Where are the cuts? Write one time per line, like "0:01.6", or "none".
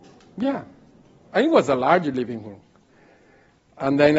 0:01.2